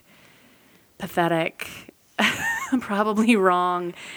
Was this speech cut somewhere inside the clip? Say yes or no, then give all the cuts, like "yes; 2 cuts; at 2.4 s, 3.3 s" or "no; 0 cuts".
no; 0 cuts